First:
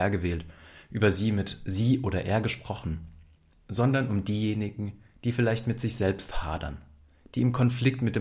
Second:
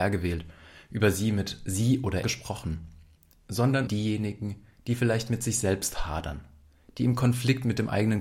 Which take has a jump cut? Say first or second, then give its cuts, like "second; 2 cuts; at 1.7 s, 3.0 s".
second; 2 cuts; at 2.2 s, 3.9 s